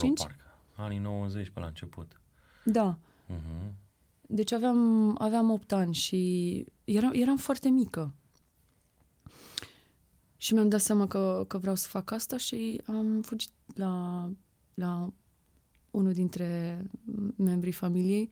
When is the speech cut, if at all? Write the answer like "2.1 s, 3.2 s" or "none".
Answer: none